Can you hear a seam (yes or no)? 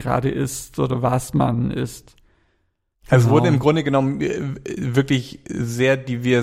yes